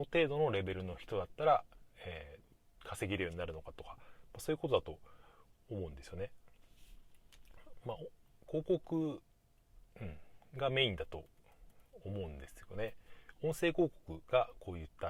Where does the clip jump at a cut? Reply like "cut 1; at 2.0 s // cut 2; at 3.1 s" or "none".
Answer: none

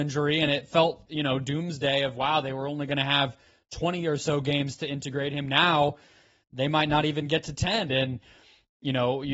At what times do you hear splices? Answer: cut 1; at 1.1 s // cut 2; at 7.9 s

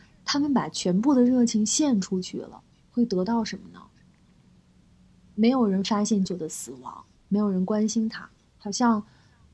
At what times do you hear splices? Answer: cut 1; at 6.3 s

